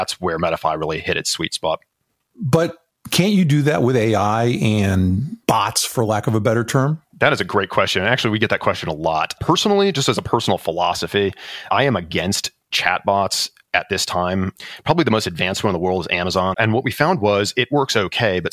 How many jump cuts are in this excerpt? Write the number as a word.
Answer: one